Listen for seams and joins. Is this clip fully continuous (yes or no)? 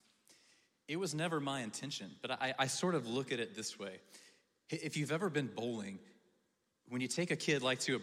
yes